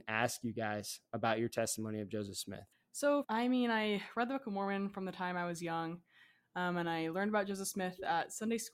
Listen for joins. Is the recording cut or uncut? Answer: cut